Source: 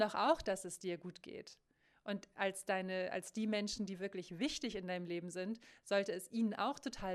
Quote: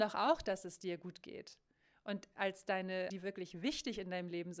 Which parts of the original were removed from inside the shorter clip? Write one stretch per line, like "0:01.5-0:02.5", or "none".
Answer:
0:03.1-0:03.9